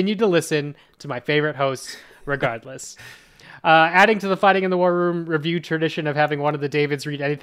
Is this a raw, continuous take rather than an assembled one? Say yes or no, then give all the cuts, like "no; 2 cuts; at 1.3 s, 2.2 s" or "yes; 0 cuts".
yes; 0 cuts